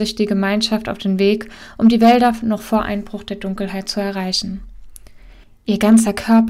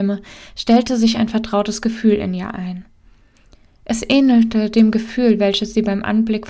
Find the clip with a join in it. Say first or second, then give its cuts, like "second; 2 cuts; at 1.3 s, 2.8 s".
first; 1 cut; at 5.4 s